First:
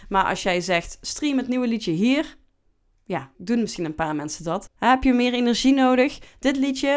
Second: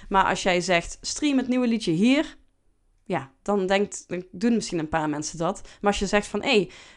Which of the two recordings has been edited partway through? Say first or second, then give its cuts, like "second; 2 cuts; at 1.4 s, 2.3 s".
first; 2 cuts; at 3.3 s, 4.7 s